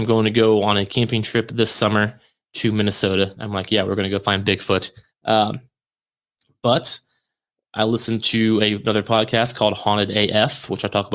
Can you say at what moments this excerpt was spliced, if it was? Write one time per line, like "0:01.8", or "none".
0:05.1